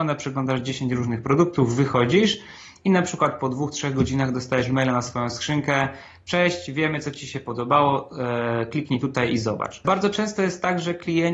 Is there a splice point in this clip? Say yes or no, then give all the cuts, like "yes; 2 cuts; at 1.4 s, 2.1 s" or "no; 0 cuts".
yes; 1 cut; at 9.8 s